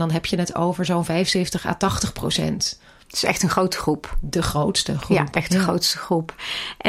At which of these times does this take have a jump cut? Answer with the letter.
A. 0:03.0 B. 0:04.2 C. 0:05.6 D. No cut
D